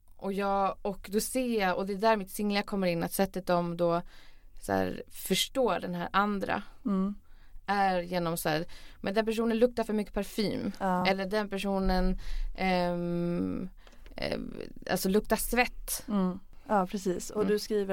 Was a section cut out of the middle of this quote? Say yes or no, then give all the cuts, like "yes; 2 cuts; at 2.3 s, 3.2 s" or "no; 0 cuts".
no; 0 cuts